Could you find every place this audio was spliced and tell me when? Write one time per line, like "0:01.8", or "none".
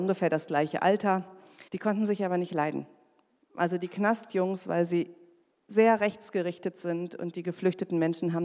0:01.7